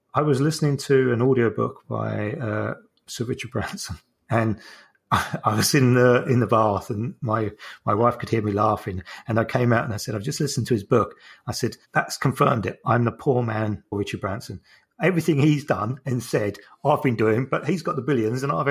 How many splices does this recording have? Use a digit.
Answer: 1